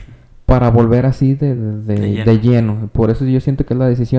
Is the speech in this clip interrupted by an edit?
no; 0 cuts

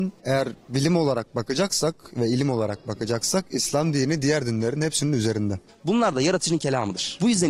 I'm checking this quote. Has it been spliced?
yes; 1 cut; at 5.7 s

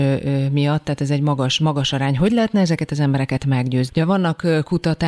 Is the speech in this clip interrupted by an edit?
yes; 1 cut; at 3.9 s

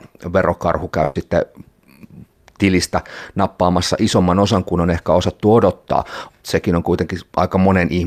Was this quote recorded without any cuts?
no; 1 cut; at 6.3 s

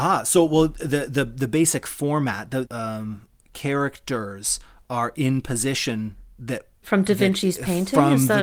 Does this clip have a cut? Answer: yes; 2 cuts; at 2.7 s, 6.8 s

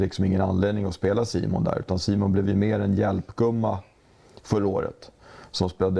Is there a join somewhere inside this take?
no; 0 cuts

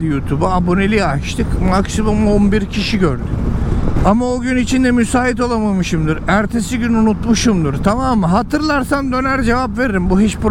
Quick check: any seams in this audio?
yes; 1 cut; at 4.0 s

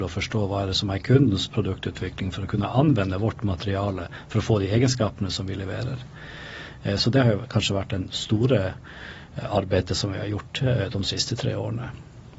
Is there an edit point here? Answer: no; 0 cuts

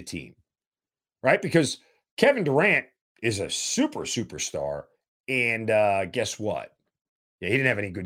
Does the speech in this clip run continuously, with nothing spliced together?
yes; 0 cuts

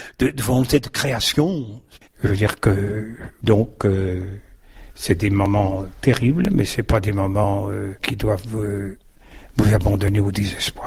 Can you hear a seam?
yes; 2 cuts; at 2.1 s, 8.0 s

